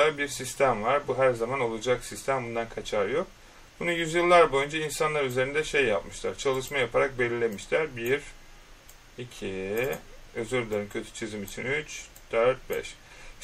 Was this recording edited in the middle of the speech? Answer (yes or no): no